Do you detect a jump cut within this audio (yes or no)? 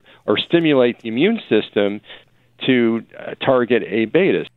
no